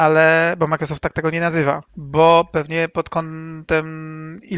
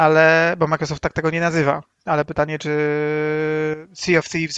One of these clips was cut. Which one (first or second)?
first